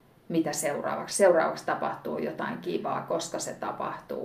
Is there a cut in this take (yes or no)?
no